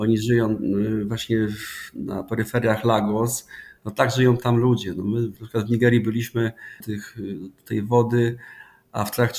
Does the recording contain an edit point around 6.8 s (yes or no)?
yes